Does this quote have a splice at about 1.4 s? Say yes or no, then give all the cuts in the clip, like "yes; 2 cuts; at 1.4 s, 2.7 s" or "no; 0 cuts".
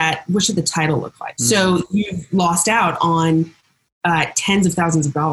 yes; 1 cut; at 1.4 s